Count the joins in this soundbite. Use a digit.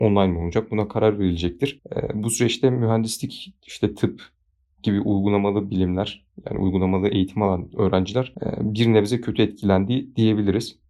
0